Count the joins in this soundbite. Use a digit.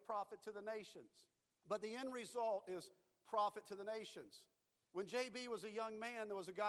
1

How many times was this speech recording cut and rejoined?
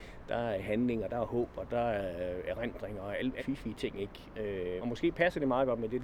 2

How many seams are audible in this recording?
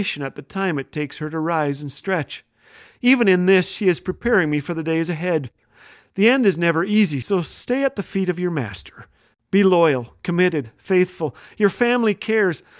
1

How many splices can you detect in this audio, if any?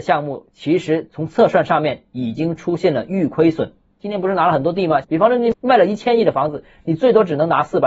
1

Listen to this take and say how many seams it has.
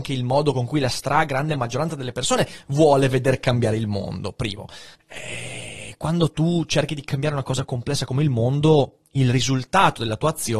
1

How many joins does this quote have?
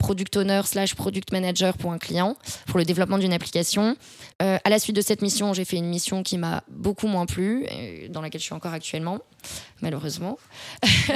1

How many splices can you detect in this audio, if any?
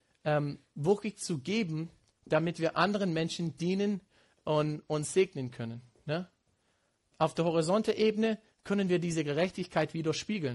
0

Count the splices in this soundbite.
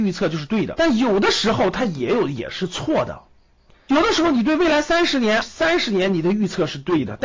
1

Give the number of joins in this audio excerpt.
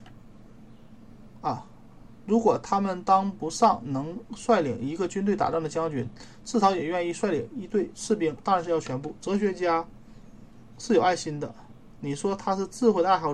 1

